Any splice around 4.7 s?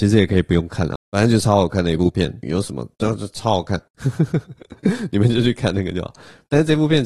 no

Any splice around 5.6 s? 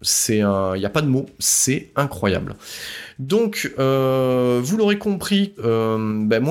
yes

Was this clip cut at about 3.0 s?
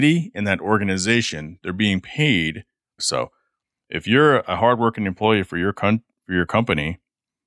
yes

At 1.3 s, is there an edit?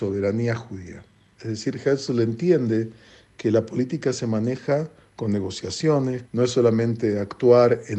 yes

